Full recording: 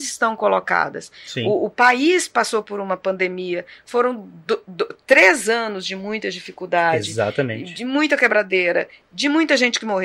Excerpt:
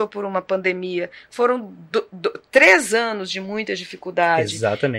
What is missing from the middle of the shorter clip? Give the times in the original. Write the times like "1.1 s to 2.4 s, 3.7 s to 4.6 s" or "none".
none

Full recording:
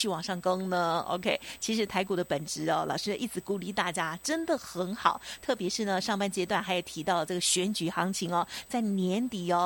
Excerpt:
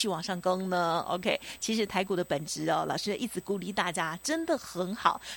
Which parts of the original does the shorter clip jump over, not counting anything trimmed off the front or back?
none

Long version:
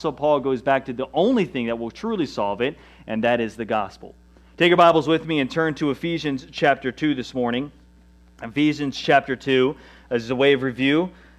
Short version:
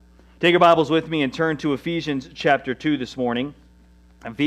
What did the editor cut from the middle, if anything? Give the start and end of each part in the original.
none

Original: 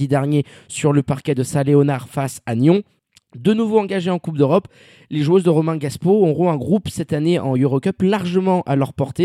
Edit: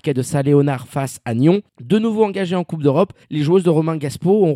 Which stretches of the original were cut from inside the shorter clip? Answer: 2.9 s to 3.2 s, 4.8 s to 5.0 s

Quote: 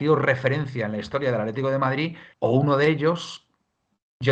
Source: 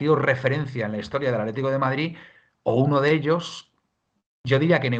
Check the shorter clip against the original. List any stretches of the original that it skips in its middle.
2.3 s to 2.6 s

